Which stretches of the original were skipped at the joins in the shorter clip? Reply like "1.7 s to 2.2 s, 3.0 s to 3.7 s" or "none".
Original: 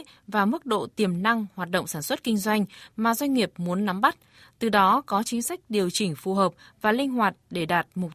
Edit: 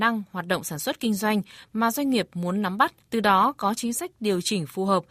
4.3 s to 4.5 s